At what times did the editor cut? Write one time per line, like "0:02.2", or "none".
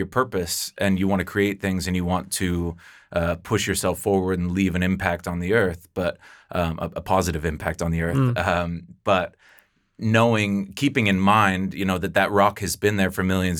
none